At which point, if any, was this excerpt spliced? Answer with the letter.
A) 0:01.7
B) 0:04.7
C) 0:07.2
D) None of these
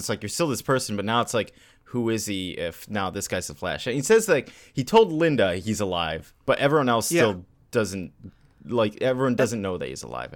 D